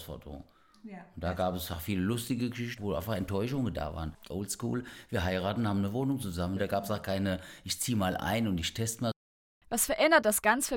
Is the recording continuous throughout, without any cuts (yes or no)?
no